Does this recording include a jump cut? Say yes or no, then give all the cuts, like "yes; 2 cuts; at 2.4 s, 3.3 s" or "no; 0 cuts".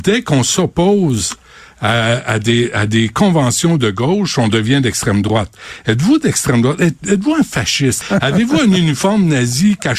yes; 1 cut; at 8.0 s